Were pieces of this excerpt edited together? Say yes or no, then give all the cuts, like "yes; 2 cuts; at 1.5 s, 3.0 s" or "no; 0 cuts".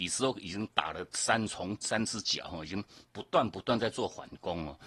yes; 1 cut; at 1.8 s